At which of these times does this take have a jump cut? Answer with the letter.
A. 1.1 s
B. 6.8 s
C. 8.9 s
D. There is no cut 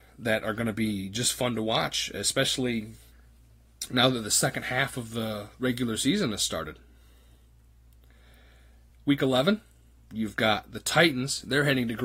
D